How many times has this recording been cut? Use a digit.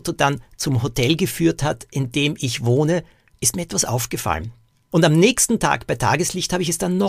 1